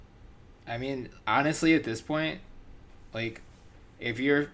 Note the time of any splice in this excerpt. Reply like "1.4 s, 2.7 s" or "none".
1.2 s